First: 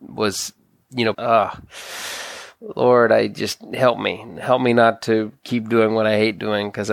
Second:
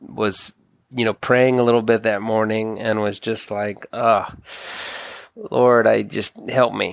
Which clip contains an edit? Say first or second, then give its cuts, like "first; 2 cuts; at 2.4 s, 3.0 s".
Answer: first; 1 cut; at 1.1 s